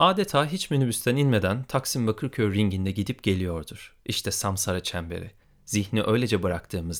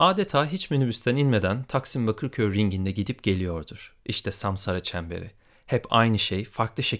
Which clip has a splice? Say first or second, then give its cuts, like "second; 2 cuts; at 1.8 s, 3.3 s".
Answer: first; 1 cut; at 5.4 s